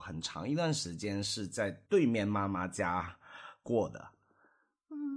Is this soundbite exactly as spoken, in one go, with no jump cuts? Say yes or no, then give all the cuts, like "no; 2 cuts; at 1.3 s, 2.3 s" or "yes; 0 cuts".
no; 1 cut; at 1.9 s